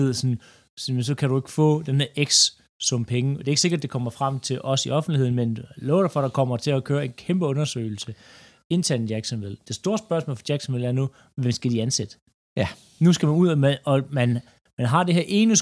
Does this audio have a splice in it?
no; 0 cuts

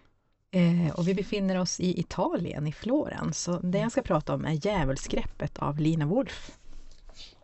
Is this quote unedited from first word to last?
yes; 0 cuts

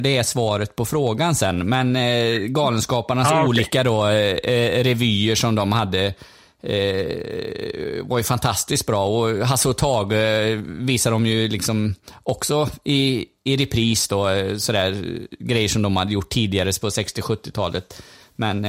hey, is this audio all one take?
yes; 0 cuts

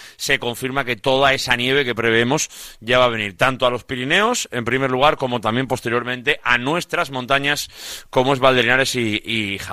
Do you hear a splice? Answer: no; 0 cuts

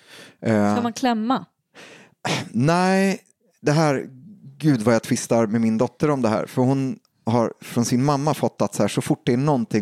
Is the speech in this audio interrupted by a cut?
no; 0 cuts

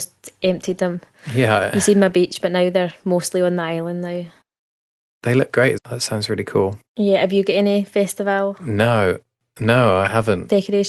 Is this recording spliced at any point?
yes; 2 cuts; at 5.8 s, 6.9 s

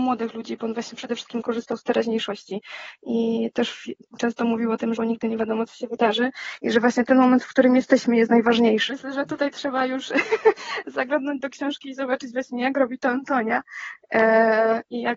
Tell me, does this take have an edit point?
yes; 2 cuts; at 5.0 s, 8.9 s

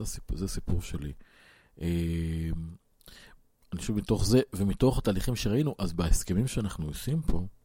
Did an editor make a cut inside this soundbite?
no; 0 cuts

